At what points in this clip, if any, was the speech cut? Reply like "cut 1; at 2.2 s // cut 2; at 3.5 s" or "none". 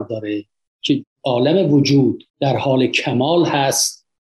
cut 1; at 2.3 s